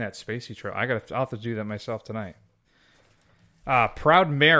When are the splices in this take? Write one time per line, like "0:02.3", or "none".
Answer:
none